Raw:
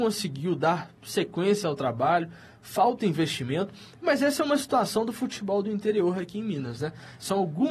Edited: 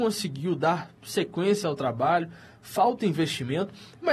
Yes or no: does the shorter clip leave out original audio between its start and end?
no